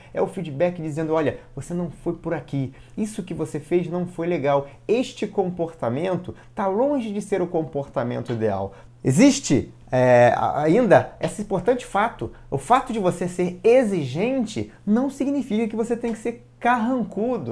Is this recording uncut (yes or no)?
no